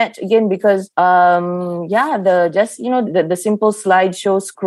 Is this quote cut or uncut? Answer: cut